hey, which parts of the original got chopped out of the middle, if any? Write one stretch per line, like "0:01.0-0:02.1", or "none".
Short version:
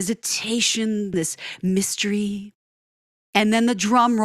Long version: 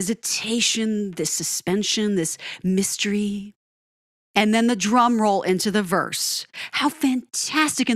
0:01.1-0:02.1